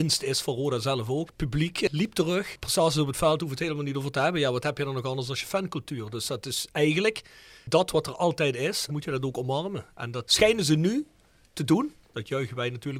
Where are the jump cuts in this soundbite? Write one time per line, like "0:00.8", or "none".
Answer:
0:01.3
0:08.9

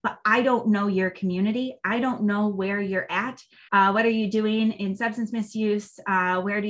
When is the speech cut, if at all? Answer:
0:03.7
0:04.7

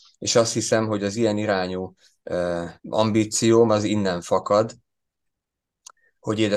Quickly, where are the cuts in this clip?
0:02.8

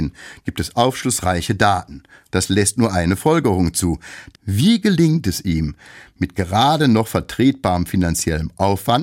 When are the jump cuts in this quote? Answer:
0:02.3
0:04.3

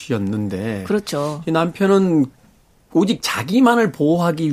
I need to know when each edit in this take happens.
none

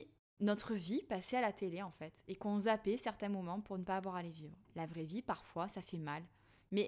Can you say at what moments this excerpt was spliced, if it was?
0:04.6

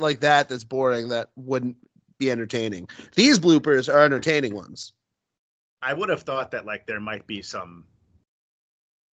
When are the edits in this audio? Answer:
none

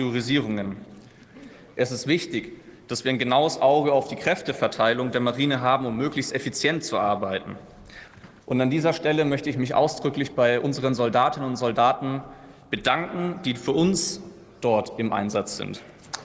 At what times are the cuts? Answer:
0:01.7
0:08.4

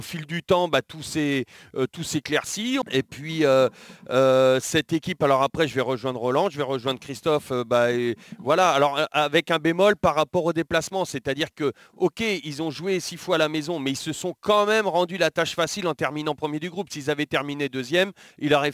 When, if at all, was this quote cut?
0:02.8

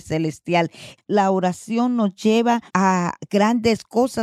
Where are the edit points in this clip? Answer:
0:01.0
0:02.7

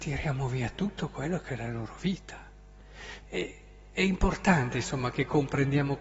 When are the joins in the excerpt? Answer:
0:03.2

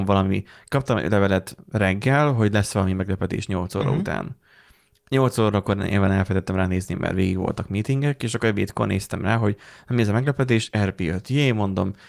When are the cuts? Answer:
none

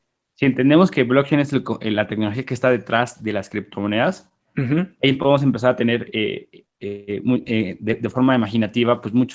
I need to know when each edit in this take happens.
none

